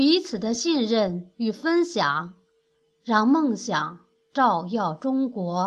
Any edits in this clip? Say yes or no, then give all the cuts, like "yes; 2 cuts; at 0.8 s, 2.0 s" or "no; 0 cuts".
no; 0 cuts